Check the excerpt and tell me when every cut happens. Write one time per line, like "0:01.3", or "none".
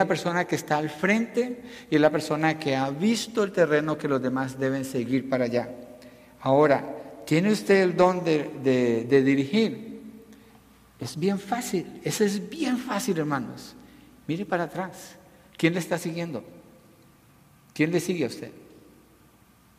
none

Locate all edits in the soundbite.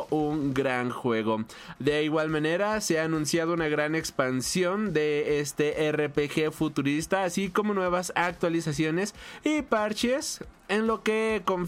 0:01.8

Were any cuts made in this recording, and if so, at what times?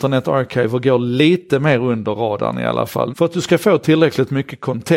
0:03.1

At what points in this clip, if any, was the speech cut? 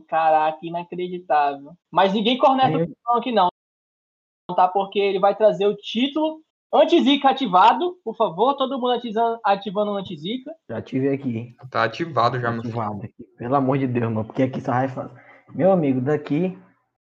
0:01.8

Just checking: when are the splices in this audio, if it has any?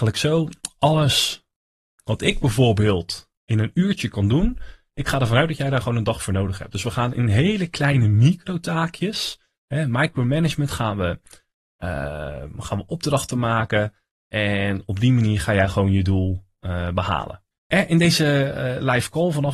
0:17.5

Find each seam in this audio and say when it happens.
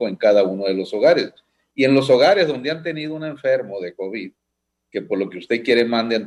none

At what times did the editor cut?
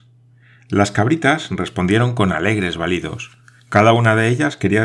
none

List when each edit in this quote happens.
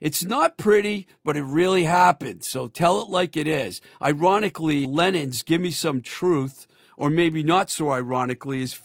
0:04.8

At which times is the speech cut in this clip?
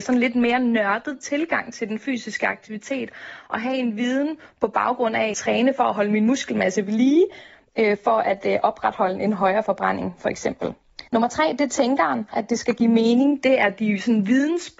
0:05.3
0:11.1
0:12.3

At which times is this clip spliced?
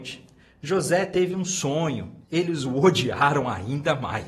0:02.2

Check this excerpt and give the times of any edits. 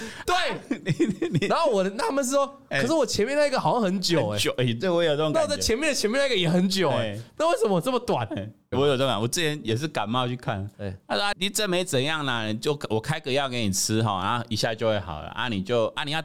0:08.7
0:11.3

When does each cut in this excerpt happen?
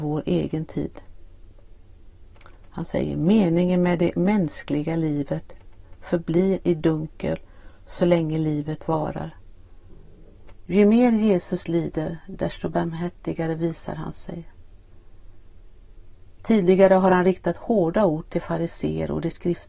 0:10.7

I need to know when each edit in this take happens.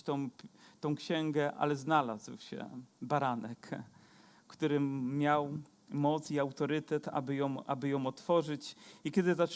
none

